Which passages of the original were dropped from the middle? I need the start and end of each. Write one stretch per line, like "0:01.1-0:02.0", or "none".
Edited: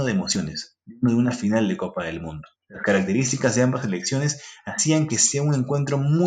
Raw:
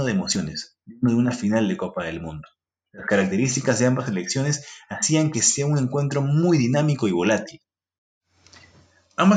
0:02.6-0:02.8